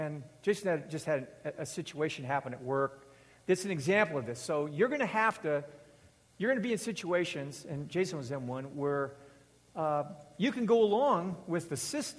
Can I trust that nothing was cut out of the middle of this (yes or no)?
yes